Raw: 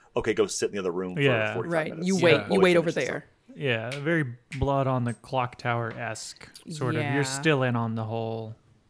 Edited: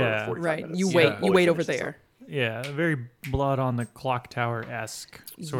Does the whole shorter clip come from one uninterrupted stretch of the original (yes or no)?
yes